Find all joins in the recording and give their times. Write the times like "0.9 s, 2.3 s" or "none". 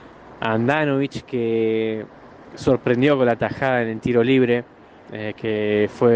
none

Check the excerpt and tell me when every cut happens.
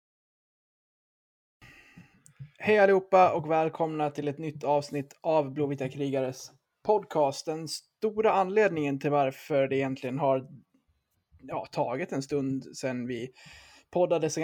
none

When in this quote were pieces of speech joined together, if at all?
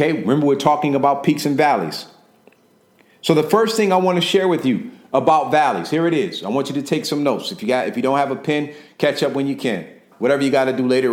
10.1 s

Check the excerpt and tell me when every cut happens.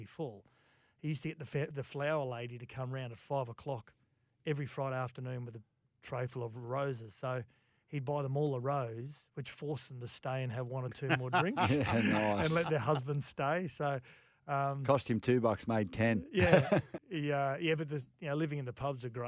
17.0 s

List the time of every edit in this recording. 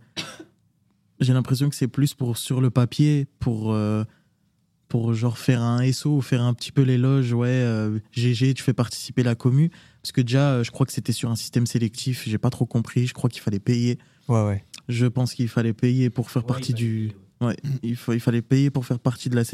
none

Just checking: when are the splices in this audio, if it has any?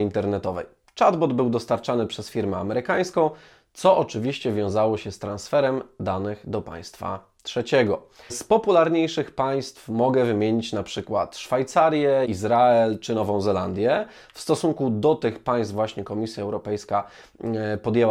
8.3 s, 12.2 s

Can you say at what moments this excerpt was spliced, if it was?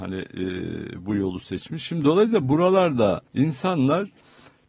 3.3 s

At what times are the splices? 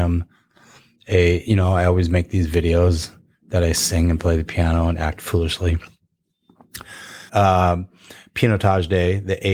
7.3 s

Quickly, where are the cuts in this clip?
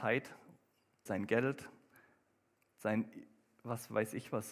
1.1 s

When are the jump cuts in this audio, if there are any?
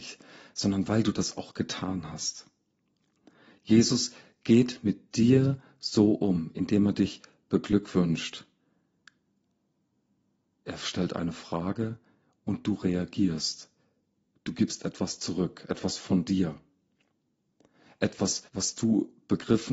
18.5 s

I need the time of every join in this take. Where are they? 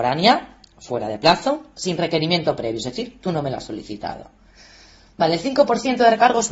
none

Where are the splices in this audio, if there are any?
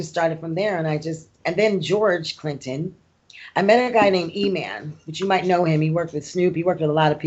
none

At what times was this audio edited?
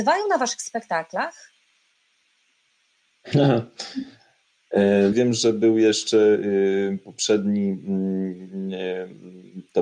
5.1 s

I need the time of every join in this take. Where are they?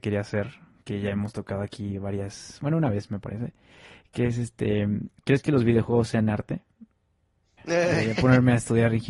7.6 s

